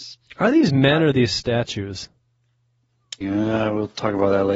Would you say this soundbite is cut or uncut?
cut